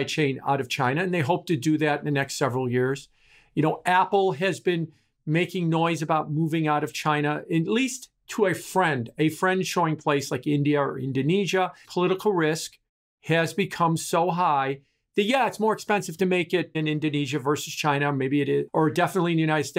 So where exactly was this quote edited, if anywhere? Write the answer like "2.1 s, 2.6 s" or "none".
11.8 s, 16.7 s, 18.7 s